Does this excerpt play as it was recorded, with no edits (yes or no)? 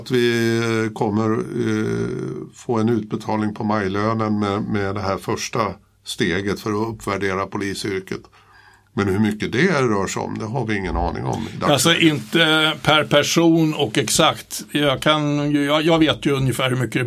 yes